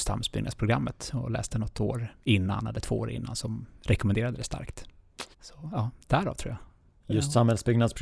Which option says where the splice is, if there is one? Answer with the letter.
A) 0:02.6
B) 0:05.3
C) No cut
B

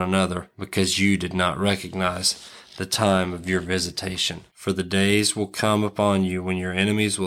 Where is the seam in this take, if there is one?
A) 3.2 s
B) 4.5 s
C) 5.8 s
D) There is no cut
B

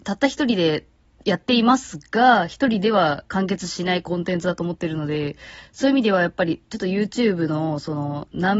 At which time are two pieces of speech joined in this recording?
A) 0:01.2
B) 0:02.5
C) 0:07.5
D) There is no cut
D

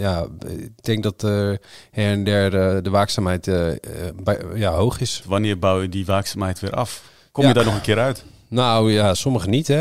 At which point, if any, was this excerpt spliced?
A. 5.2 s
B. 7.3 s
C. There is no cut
C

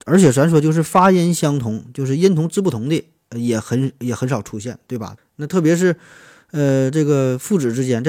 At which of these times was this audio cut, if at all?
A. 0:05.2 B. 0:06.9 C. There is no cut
A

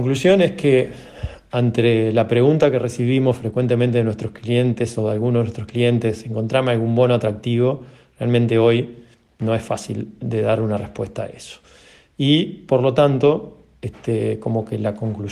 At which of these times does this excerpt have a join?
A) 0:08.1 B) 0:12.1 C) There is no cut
C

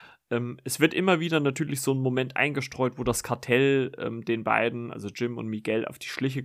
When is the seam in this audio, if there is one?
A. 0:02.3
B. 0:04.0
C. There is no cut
C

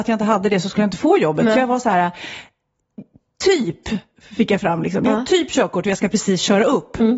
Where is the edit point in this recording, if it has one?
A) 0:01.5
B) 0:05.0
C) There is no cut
C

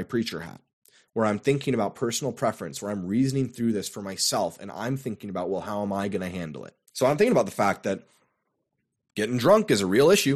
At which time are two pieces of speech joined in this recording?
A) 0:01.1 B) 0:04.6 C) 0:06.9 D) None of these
C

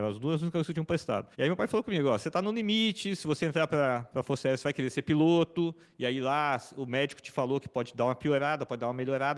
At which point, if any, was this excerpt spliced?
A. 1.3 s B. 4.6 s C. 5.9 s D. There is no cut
A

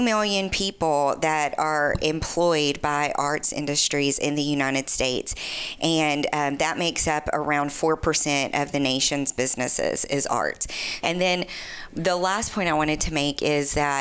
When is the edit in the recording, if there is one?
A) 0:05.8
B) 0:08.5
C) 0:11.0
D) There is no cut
C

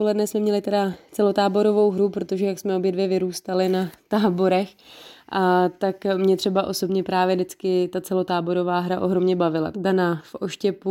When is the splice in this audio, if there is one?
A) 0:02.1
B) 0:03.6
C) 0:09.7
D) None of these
C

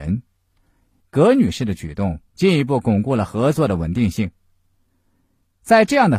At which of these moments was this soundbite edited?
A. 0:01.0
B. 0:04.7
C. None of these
A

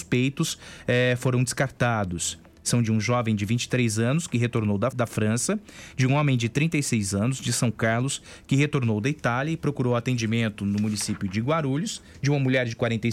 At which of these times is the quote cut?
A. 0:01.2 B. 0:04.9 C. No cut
B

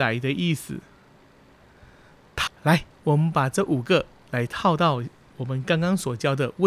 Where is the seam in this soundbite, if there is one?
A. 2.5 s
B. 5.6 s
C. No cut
A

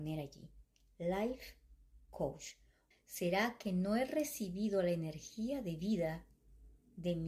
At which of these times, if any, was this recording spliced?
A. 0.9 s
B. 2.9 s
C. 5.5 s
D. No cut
B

